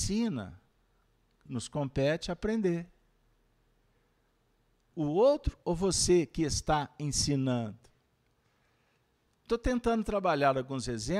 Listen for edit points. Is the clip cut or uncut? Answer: cut